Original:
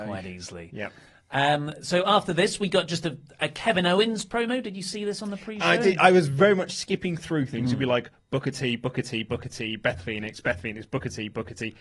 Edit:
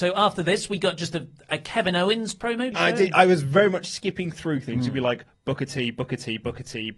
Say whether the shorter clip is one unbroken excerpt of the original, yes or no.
no